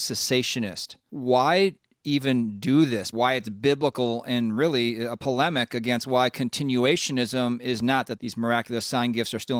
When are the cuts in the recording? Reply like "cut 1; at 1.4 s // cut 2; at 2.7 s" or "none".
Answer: cut 1; at 1.1 s // cut 2; at 3.1 s